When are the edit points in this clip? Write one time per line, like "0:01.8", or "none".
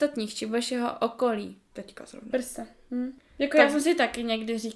0:01.7